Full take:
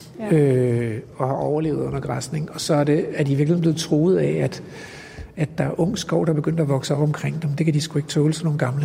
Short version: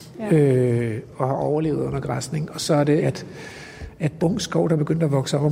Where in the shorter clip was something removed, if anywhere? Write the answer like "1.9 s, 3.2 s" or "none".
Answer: 3.0 s, 4.2 s